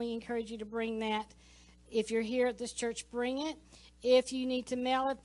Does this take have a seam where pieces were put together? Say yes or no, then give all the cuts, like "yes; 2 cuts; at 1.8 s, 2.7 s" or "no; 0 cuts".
no; 0 cuts